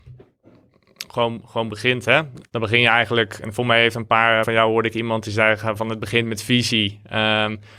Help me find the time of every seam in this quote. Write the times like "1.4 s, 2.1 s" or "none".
2.4 s, 4.4 s